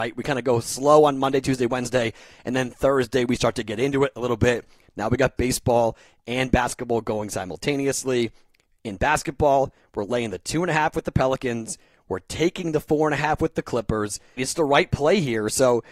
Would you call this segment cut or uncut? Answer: cut